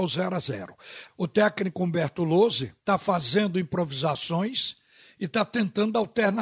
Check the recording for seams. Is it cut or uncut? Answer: cut